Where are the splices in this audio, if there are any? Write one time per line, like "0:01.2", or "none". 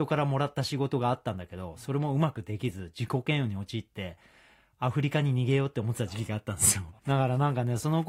0:07.0